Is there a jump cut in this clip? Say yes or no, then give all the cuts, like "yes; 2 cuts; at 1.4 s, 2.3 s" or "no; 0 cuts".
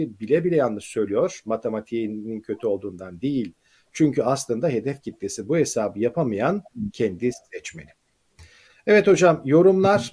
no; 0 cuts